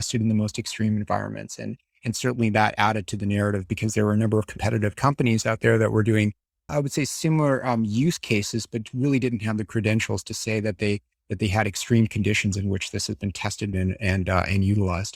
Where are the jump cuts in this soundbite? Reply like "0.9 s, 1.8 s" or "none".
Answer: 6.7 s, 13.7 s